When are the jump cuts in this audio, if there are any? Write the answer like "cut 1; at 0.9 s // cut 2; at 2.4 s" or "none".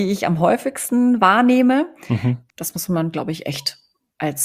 cut 1; at 2.5 s